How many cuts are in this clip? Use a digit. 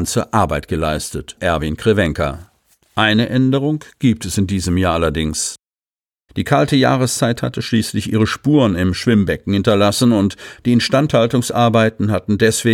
2